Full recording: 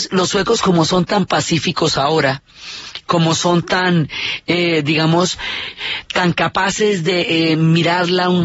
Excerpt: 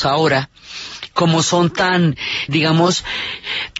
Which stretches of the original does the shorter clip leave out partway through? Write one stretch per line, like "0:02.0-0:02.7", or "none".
0:04.4-0:04.8